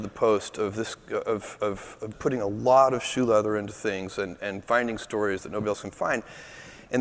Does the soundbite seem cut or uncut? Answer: cut